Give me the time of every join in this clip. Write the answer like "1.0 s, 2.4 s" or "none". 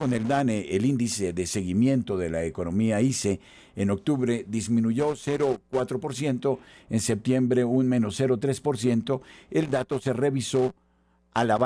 none